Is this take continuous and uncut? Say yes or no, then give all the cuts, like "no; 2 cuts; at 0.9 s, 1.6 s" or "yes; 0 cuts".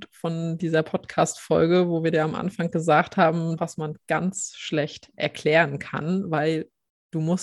no; 1 cut; at 3.6 s